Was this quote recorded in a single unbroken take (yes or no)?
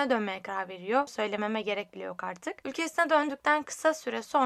no